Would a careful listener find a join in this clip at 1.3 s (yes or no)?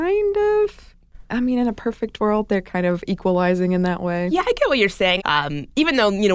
no